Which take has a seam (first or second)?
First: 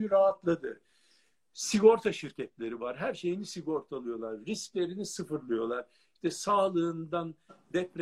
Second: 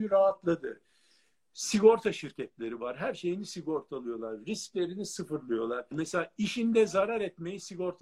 second